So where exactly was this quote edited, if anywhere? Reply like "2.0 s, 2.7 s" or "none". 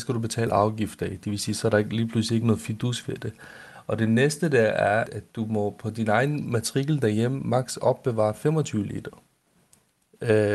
5.1 s